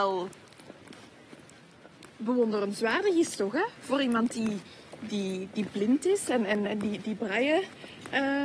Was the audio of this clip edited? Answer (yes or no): no